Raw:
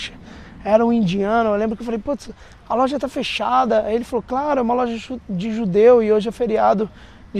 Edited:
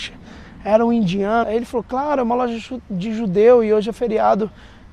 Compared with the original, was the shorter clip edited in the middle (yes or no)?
yes